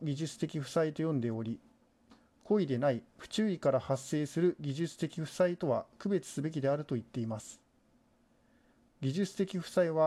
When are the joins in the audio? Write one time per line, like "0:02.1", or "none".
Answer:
none